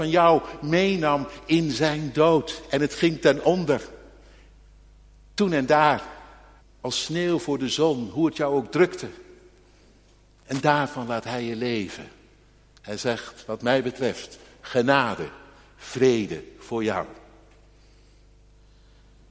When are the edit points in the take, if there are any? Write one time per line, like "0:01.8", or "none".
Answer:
0:06.6